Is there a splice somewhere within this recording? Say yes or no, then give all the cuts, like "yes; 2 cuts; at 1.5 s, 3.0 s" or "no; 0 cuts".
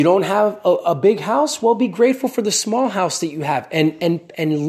no; 0 cuts